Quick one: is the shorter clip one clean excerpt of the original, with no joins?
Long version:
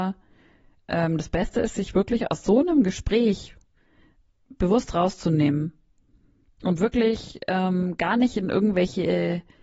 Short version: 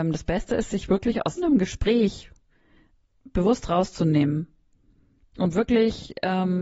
no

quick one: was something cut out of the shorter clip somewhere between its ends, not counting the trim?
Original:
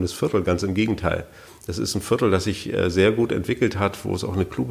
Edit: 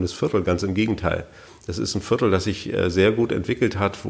no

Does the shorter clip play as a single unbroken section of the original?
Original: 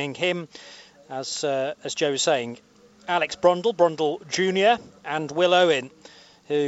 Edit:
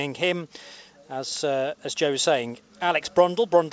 no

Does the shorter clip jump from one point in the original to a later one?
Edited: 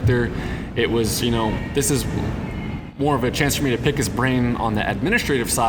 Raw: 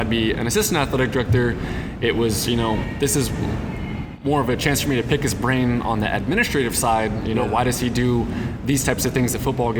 no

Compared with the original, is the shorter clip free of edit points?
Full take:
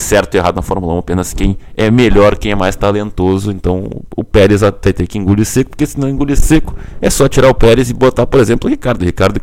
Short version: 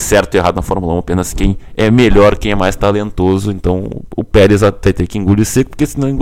yes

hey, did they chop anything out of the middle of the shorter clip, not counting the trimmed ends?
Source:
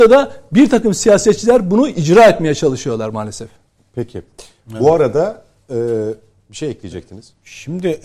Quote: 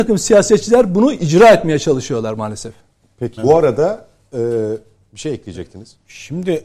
yes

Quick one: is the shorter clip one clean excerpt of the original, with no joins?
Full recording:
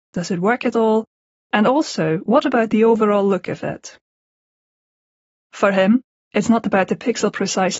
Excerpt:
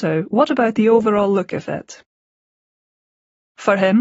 yes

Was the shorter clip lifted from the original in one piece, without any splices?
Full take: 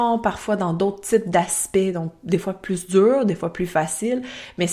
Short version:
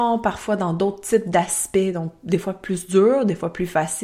yes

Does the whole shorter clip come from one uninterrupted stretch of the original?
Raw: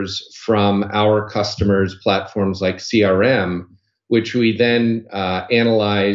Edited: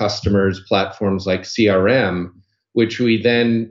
yes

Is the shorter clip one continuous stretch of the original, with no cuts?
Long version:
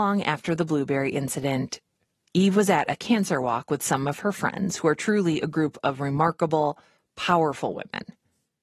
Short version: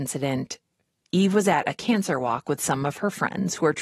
yes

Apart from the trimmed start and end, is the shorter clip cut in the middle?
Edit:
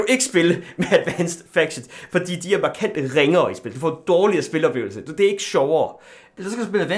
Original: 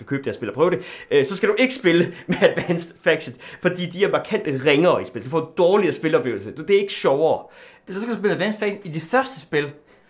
no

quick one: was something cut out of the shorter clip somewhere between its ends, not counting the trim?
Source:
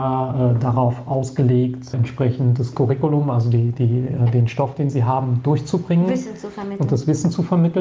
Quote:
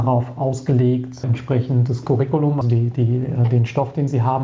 yes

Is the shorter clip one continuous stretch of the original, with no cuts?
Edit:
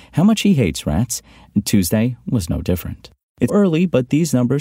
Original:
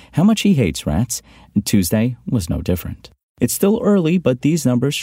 no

